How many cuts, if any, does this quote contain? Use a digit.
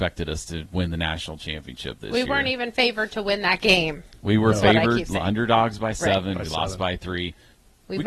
0